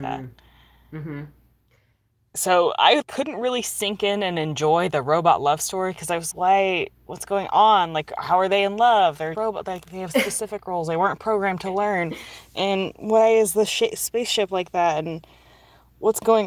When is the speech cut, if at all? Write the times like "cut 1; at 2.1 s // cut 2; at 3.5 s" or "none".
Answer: cut 1; at 3.0 s // cut 2; at 6.3 s // cut 3; at 9.3 s